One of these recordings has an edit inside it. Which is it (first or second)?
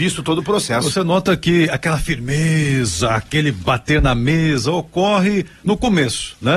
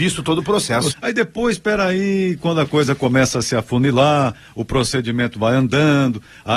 second